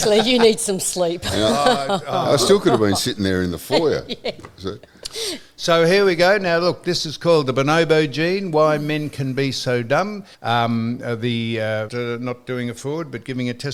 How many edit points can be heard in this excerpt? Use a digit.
2